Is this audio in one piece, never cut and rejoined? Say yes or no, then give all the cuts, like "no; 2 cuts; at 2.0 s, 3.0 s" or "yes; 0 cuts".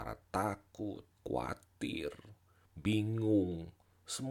no; 1 cut; at 1.2 s